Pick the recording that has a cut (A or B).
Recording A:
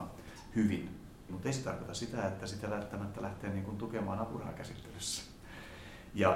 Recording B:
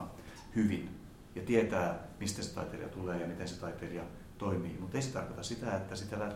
A